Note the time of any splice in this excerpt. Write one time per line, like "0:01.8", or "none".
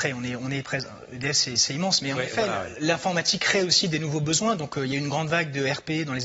none